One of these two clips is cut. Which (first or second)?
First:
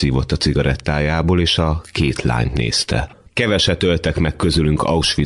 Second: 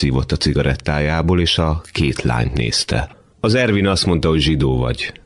first